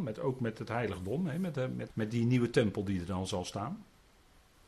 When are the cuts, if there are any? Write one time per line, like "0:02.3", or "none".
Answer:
0:01.9